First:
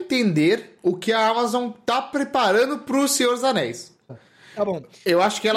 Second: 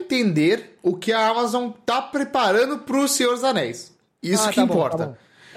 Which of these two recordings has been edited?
first; 1 cut; at 4.1 s

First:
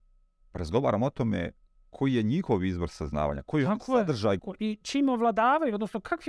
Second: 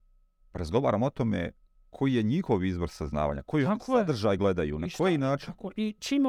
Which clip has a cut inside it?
first; 1 cut; at 4.4 s

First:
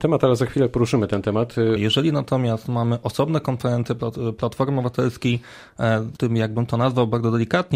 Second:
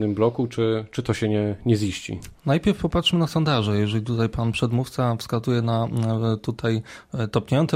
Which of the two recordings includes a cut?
first; 2 cuts; at 1.8 s, 6.2 s

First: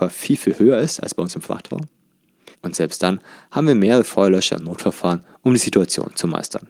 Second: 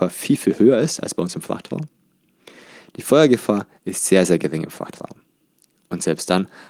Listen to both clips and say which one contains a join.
first; 1 cut; at 2.5 s

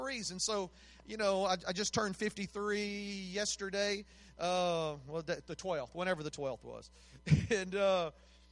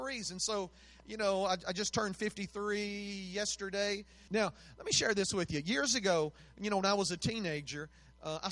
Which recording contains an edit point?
second; 1 cut; at 4.3 s

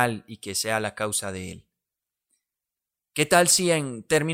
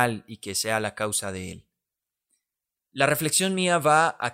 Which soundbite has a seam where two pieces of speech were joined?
second; 1 cut; at 2.9 s

